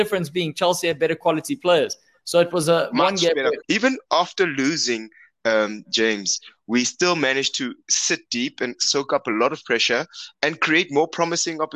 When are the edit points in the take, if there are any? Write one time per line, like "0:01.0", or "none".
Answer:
0:03.6

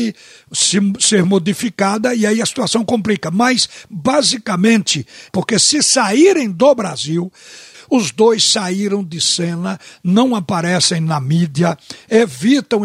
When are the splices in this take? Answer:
0:05.3
0:07.7

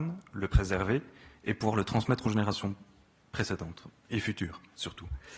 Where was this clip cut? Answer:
none

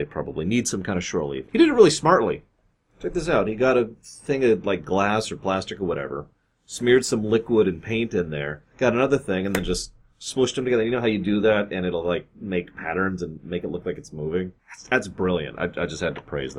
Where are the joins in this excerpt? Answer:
0:01.5
0:14.6

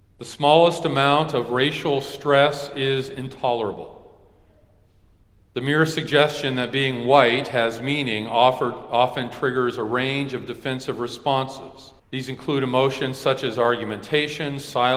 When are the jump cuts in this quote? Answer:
0:12.0

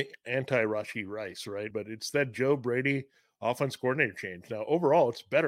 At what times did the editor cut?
0:01.7

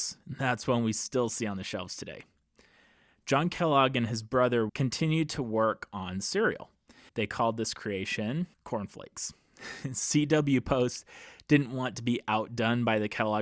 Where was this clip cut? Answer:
0:04.7
0:07.1
0:08.5

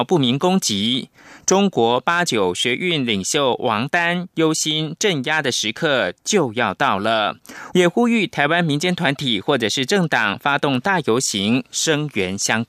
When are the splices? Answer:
0:07.7

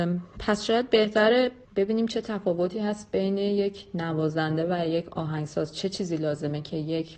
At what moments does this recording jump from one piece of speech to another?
0:01.6

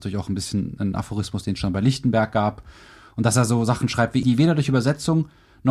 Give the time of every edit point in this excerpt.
0:04.2

